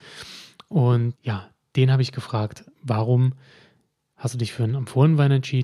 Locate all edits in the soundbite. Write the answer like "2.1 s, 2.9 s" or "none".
1.1 s, 2.7 s